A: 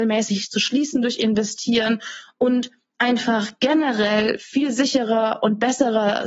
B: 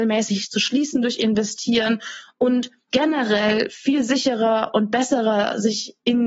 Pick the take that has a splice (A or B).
B